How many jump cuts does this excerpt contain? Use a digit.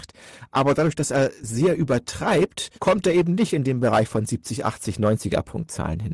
1